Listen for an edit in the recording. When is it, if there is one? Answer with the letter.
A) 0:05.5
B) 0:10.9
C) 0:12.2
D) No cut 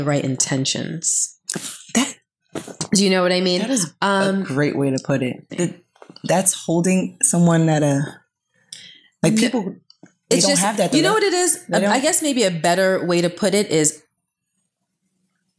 A